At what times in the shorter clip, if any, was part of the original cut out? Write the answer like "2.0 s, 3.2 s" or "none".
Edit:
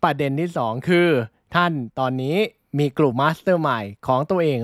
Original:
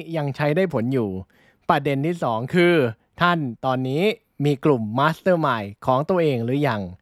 3.1 s